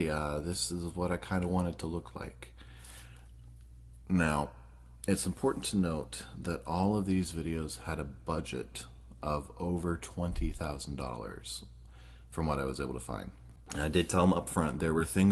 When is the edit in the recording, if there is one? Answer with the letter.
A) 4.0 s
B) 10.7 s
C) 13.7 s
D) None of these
C